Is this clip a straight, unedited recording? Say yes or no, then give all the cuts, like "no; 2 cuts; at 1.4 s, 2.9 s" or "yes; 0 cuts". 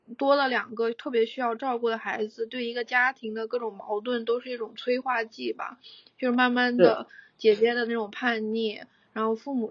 yes; 0 cuts